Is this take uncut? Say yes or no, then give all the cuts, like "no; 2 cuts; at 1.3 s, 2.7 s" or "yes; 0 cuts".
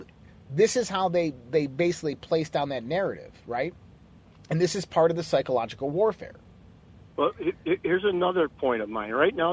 yes; 0 cuts